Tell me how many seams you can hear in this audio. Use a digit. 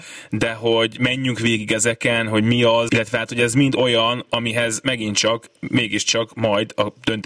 1